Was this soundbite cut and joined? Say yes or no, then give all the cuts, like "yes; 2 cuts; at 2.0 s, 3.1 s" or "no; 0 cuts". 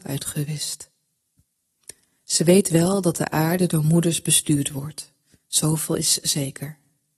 no; 0 cuts